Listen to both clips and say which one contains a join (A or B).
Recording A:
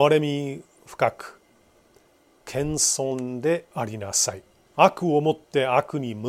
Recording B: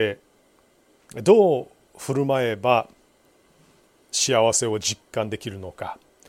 A